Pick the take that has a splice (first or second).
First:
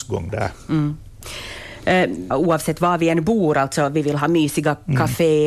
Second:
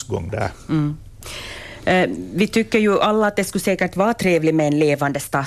first